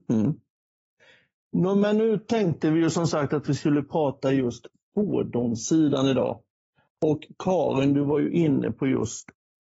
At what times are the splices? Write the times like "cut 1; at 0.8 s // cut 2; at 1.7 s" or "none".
none